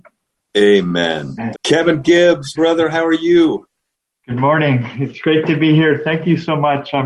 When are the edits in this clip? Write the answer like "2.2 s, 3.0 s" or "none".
1.5 s, 2.5 s